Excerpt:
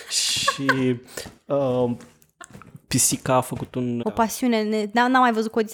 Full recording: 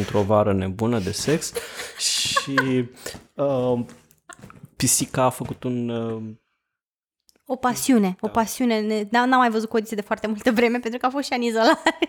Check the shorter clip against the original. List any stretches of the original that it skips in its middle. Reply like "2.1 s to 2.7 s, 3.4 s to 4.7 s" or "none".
5.9 s to 8.2 s